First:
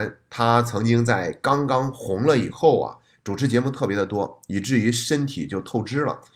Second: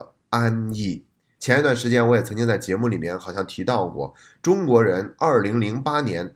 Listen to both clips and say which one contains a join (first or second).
second